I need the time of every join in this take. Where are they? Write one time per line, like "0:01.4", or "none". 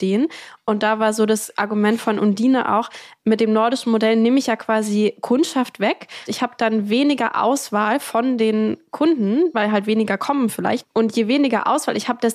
0:06.3
0:09.5
0:10.8